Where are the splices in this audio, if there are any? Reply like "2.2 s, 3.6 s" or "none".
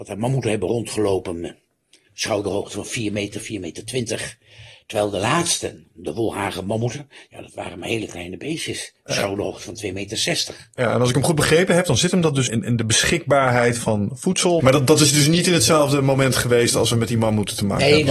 12.5 s, 14.6 s